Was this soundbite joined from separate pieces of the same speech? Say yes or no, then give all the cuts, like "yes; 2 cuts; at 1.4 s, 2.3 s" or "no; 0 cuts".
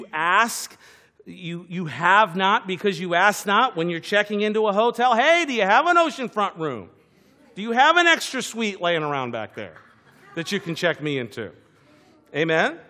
no; 0 cuts